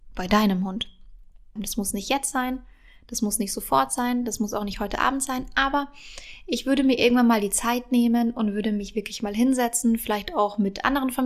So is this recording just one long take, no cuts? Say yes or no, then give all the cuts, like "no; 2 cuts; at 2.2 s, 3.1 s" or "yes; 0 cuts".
no; 1 cut; at 1.6 s